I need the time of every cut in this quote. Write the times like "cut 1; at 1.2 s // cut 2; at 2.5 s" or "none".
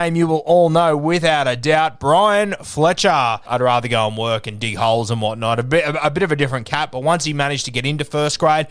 cut 1; at 3.5 s